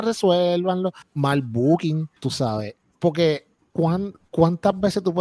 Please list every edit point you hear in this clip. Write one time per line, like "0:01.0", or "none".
0:01.0
0:02.2
0:03.7